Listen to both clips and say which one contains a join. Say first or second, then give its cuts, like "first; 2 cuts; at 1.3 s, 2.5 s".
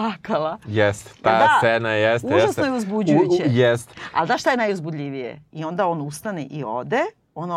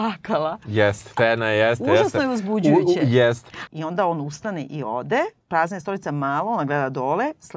second; 3 cuts; at 1.2 s, 3.7 s, 5.4 s